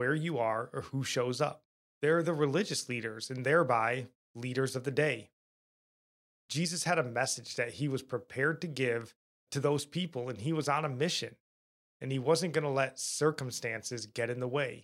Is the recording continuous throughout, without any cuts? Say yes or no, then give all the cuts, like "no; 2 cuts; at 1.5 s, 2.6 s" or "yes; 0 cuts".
no; 2 cuts; at 1.9 s, 9.5 s